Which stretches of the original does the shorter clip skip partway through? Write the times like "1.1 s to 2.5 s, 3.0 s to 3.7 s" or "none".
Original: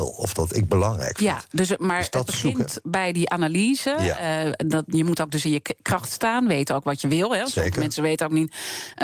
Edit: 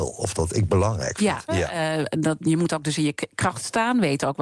1.5 s to 4.0 s